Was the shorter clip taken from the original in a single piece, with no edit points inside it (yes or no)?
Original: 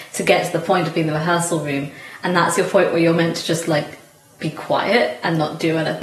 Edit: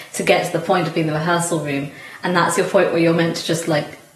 yes